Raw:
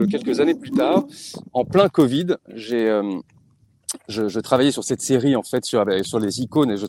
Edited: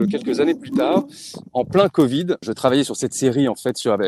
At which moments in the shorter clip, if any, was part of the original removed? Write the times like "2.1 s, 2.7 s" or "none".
2.4 s